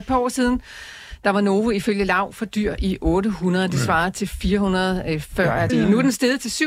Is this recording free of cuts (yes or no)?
no